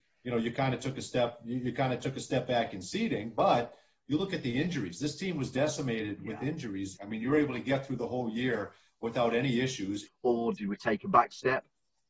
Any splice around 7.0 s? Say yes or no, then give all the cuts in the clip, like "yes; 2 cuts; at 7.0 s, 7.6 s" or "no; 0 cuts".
yes; 2 cuts; at 7.0 s, 10.1 s